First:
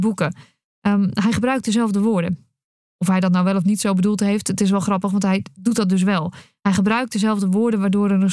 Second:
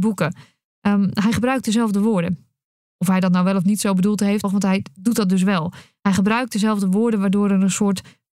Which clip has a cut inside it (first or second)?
second